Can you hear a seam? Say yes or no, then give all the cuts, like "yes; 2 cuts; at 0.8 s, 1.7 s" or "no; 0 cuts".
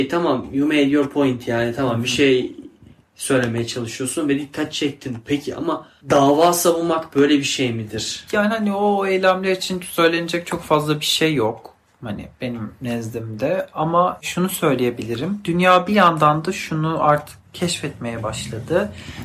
no; 0 cuts